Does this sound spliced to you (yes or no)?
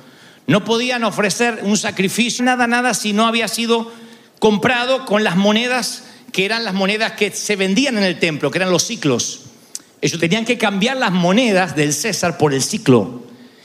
yes